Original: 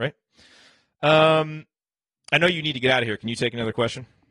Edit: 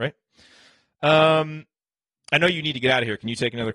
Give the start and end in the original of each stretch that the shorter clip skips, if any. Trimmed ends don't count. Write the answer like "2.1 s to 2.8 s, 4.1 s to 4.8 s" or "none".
none